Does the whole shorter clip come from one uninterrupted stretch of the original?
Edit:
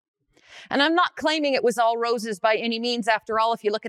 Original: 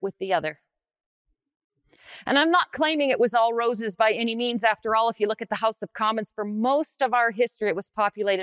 yes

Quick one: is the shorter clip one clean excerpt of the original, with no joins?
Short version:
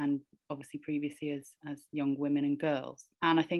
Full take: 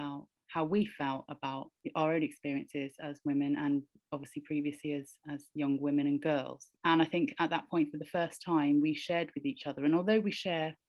yes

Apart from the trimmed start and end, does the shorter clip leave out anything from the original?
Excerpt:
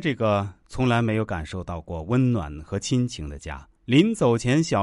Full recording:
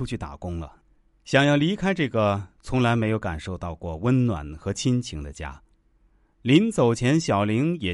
yes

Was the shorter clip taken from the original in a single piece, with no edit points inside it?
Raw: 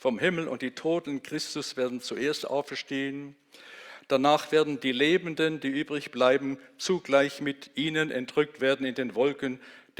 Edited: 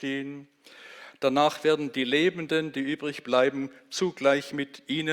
yes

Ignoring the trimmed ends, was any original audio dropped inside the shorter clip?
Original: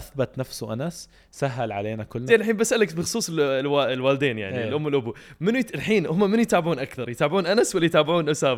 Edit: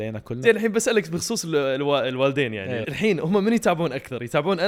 yes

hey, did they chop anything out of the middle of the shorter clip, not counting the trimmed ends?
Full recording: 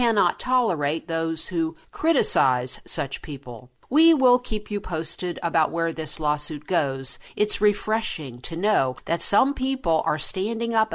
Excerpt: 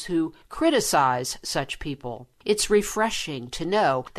yes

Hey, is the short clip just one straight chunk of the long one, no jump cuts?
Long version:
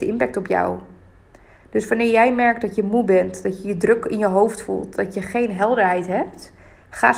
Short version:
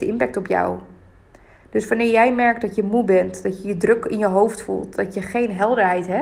yes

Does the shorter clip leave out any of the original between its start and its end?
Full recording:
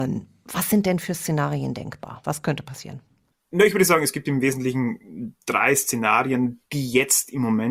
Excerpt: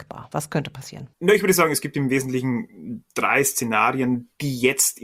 yes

